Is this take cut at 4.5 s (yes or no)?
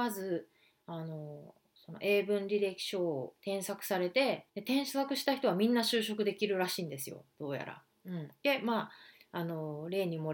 yes